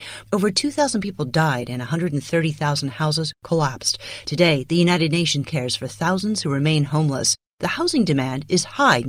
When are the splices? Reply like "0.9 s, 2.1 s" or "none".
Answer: 5.4 s